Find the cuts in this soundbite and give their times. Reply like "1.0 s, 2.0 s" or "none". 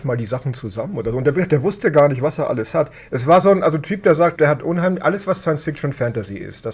4.4 s